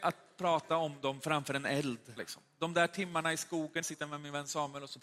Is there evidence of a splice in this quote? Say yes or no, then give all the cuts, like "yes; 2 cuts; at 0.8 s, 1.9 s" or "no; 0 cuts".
yes; 2 cuts; at 2.2 s, 3.8 s